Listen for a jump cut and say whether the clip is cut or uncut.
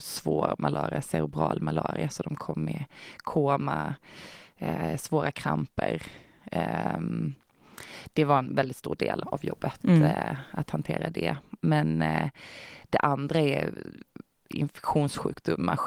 cut